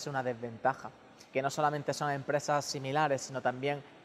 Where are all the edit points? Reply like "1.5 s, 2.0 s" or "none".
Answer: 1.3 s